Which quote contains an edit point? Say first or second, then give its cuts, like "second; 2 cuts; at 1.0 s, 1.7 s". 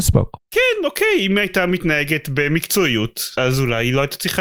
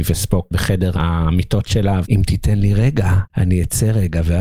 second; 1 cut; at 2.0 s